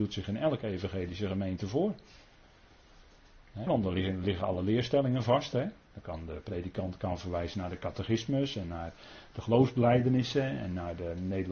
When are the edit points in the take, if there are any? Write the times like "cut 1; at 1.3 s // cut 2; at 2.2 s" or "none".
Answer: cut 1; at 3.7 s